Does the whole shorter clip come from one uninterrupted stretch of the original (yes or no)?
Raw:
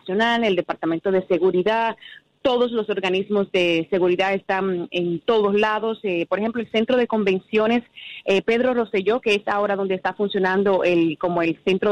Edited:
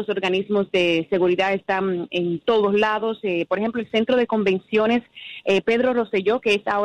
yes